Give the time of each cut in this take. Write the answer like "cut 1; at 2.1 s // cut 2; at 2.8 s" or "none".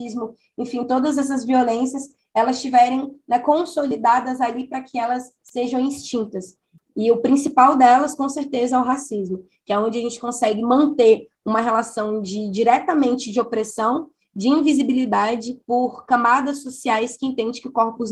cut 1; at 6.8 s // cut 2; at 15.6 s